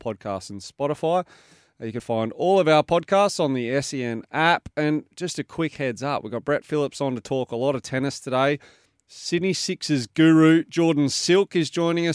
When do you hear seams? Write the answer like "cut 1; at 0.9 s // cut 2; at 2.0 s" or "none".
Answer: cut 1; at 2.0 s